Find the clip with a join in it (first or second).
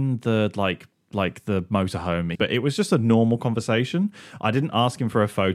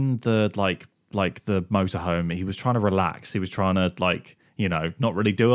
first